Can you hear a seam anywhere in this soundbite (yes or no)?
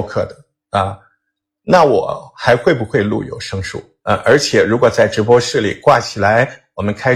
yes